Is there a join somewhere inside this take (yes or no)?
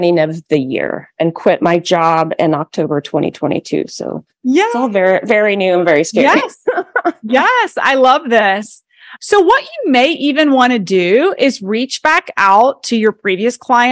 no